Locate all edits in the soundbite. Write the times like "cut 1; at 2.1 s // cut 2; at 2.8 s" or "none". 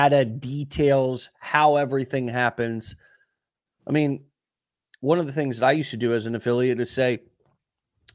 none